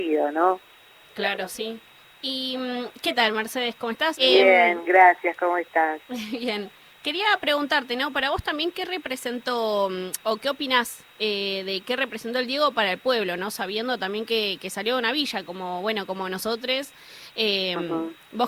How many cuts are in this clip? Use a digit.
1